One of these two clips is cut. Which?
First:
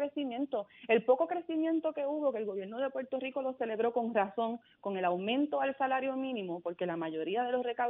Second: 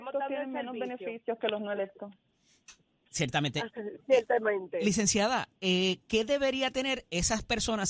second; 1 cut; at 3.7 s

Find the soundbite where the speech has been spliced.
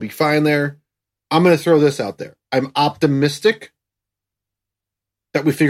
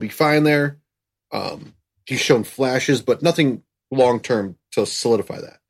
first; 1 cut; at 1.2 s

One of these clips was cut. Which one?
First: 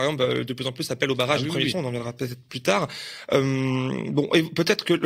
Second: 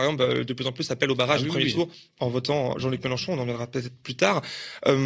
first; 1 cut; at 1.7 s

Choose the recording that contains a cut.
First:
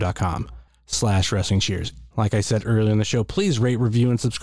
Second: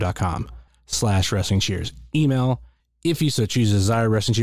first; 1 cut; at 2.1 s

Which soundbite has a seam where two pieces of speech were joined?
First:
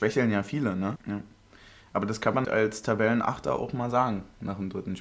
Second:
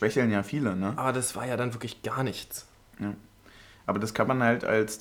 first; 2 cuts; at 1.0 s, 2.4 s

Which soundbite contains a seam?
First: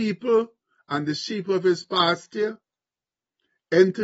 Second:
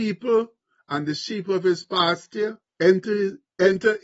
second; 1 cut; at 2.7 s

